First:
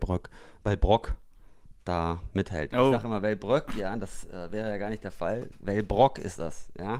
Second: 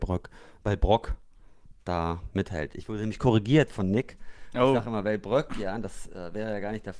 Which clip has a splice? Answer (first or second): first